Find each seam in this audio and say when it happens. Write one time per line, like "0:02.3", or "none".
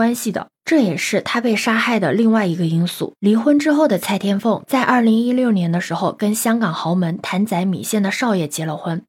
0:03.2